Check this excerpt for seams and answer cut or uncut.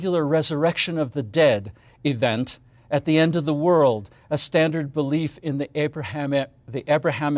uncut